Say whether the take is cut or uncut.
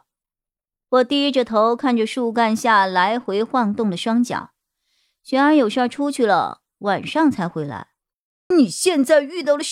cut